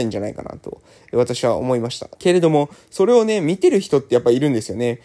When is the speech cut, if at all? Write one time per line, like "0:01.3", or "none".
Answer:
0:02.2